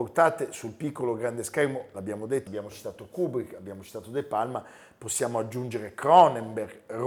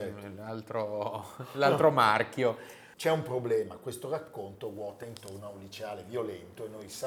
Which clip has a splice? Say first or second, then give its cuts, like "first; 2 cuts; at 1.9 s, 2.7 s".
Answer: first; 1 cut; at 2.5 s